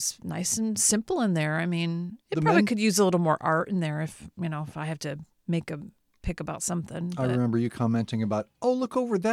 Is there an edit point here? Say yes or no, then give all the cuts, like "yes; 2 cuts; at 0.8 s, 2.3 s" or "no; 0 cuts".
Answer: no; 0 cuts